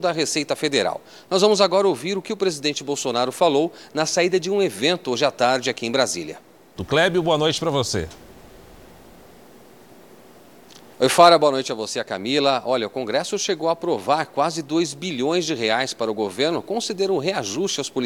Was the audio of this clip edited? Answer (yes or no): yes